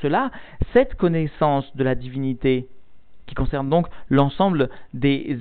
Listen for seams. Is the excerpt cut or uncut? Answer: uncut